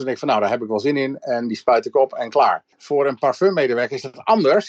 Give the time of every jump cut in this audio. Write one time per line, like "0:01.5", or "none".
0:02.7